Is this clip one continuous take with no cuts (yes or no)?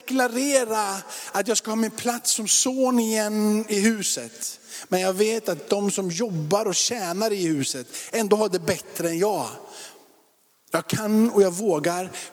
yes